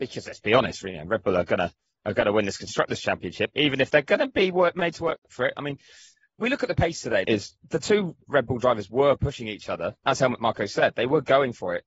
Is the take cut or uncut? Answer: cut